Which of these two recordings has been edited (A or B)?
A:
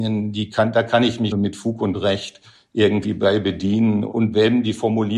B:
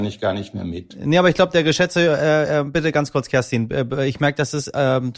A